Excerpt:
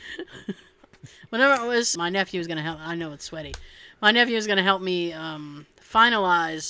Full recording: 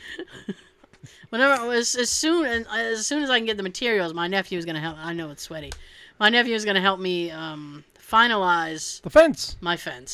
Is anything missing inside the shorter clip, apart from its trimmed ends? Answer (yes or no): yes